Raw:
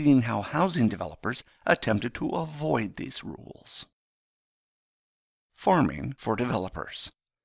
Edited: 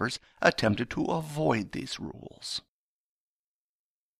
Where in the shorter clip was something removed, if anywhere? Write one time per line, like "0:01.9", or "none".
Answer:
none

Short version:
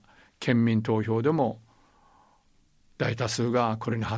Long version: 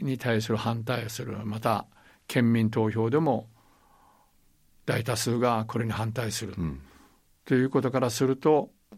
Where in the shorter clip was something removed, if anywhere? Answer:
none

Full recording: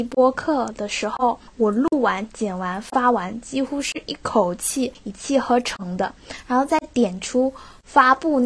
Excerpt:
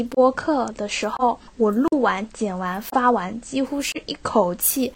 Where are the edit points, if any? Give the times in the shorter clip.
none

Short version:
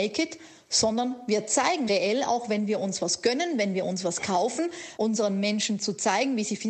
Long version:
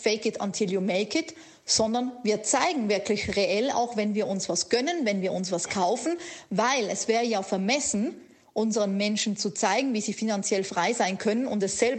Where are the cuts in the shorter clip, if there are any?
0:01.9
0:05.0

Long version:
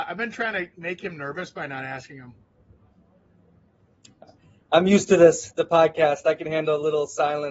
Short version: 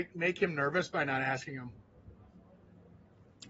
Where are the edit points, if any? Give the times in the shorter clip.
none

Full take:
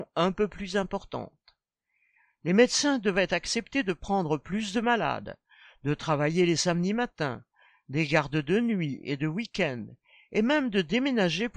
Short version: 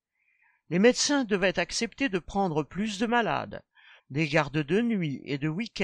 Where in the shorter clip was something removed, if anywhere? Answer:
0:04.0

